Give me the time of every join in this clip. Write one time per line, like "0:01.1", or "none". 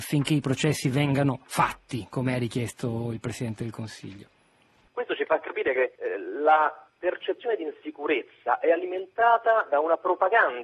0:04.9
0:06.0